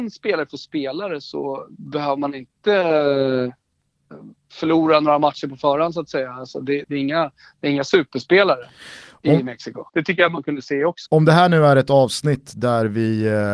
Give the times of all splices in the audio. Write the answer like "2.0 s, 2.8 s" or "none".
6.8 s, 9.9 s, 11.1 s

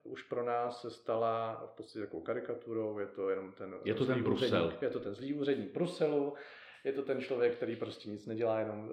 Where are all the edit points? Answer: none

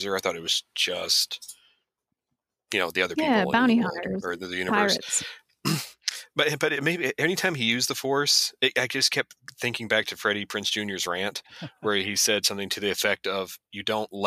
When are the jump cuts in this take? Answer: none

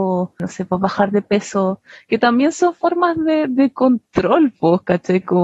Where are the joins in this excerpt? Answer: none

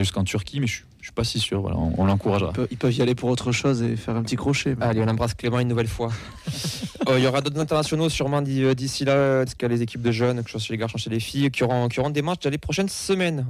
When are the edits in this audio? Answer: 9.5 s

